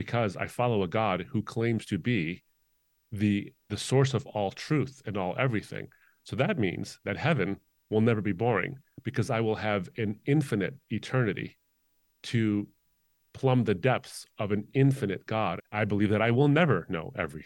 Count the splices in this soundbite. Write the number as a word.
two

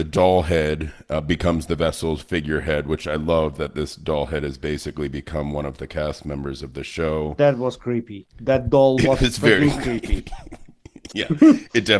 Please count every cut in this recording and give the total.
one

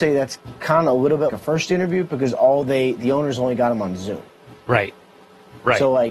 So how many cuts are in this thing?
one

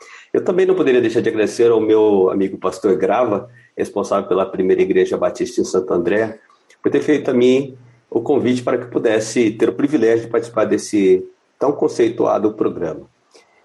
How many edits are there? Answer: zero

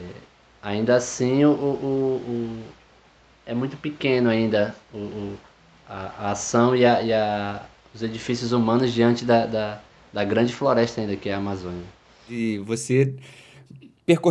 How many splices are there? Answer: zero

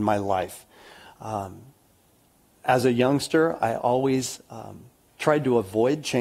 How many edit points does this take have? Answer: zero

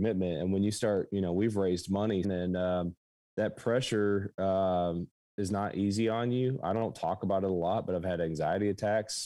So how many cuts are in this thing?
one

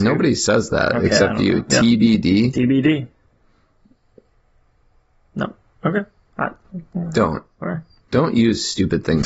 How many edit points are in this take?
zero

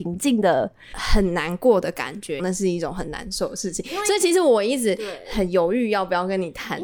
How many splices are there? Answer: two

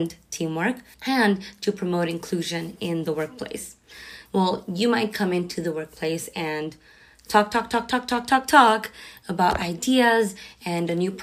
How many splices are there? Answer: two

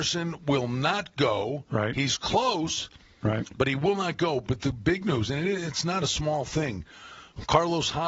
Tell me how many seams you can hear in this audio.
zero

